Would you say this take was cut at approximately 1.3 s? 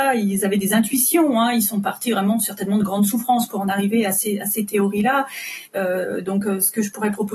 no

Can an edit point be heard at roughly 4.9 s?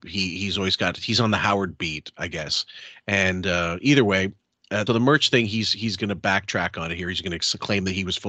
yes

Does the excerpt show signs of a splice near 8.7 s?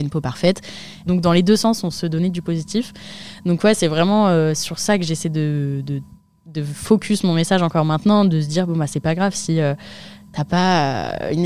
no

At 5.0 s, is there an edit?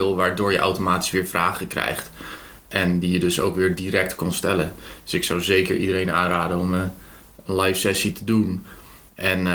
no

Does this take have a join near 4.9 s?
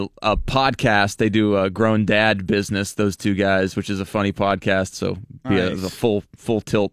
yes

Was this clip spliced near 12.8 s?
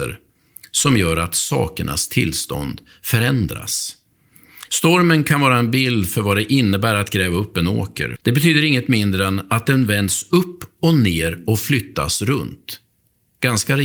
no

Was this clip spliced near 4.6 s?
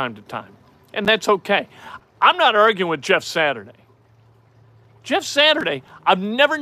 no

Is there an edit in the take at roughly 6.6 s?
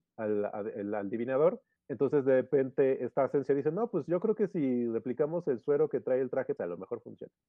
yes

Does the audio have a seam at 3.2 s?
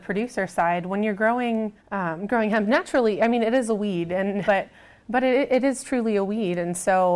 no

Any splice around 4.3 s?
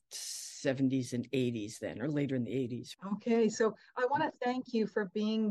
no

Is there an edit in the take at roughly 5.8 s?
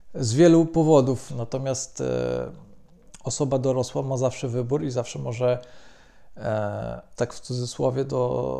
no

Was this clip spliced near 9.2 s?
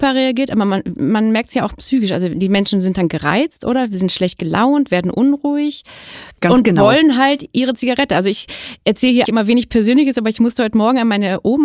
yes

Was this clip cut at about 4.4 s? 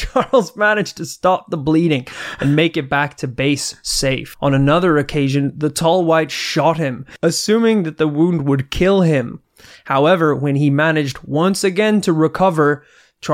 no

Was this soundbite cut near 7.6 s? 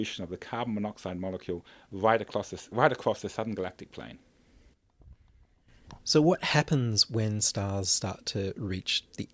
no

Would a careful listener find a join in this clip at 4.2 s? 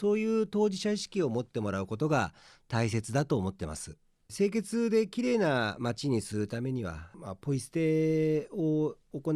yes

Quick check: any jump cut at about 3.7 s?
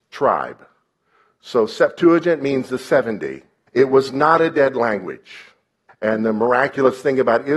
yes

